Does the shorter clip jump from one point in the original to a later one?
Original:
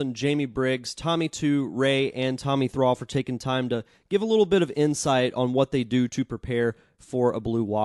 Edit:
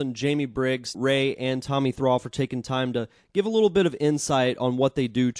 yes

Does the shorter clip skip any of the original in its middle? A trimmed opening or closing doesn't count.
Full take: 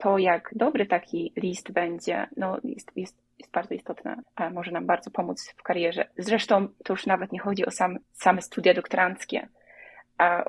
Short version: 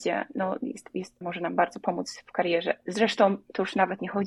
yes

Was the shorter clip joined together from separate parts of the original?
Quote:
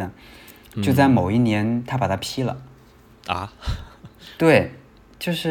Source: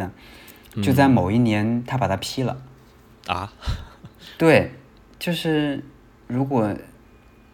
no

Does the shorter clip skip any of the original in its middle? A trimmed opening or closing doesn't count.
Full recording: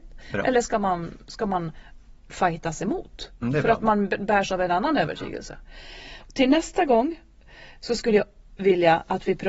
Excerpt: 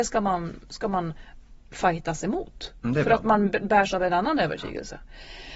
no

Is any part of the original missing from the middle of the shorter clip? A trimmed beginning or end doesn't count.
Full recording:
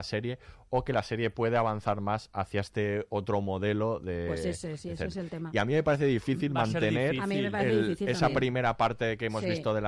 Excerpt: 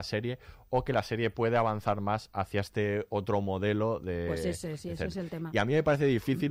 no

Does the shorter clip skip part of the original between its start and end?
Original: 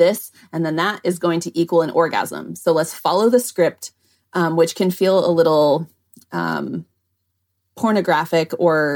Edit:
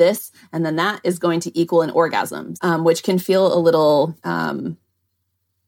yes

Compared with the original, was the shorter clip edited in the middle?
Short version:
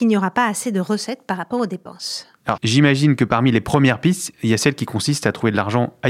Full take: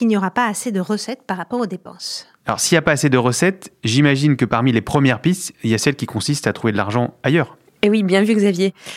yes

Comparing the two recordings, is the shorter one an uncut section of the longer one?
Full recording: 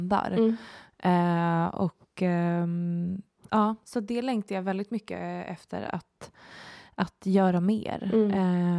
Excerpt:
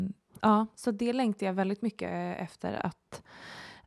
yes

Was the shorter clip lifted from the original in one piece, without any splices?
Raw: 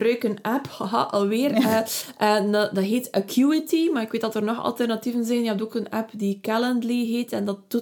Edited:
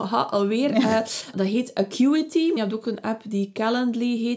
no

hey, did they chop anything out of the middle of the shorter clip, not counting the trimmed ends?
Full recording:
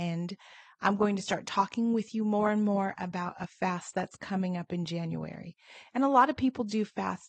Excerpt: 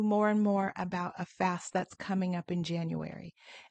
no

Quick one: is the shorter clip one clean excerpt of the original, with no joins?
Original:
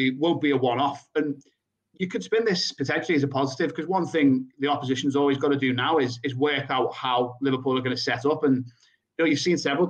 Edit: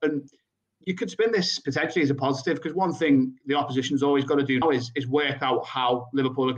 no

